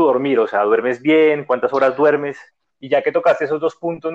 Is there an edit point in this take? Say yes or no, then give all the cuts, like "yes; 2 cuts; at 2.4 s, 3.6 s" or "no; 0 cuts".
yes; 1 cut; at 2.7 s